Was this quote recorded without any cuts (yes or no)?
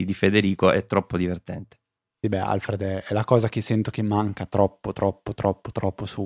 yes